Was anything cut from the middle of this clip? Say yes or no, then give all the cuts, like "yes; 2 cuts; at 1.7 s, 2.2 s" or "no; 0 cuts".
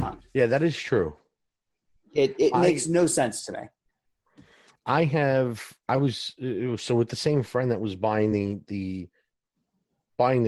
no; 0 cuts